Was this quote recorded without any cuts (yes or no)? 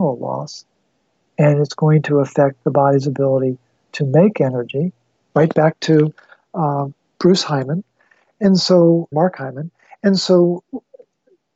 no